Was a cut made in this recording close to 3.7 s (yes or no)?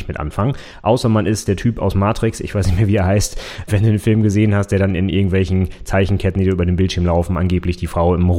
yes